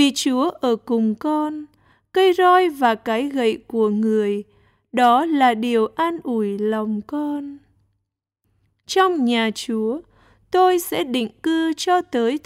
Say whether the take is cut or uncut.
uncut